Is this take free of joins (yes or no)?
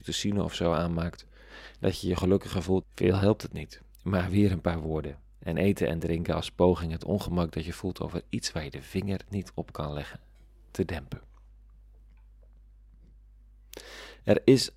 no